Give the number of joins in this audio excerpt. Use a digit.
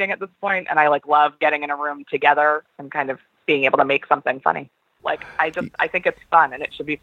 1